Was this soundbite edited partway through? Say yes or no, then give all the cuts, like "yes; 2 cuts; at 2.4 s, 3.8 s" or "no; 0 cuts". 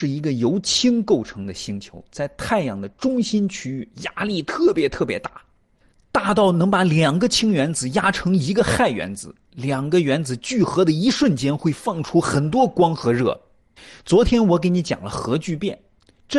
no; 0 cuts